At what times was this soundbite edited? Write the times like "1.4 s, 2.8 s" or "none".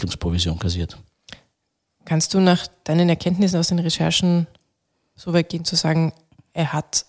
none